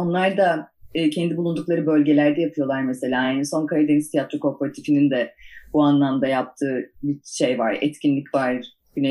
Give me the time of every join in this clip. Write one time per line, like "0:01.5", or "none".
none